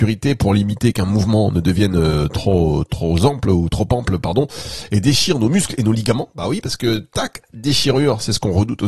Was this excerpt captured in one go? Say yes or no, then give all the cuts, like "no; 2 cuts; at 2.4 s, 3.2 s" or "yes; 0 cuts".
yes; 0 cuts